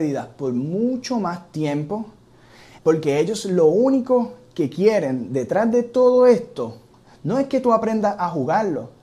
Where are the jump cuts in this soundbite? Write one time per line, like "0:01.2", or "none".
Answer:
0:02.8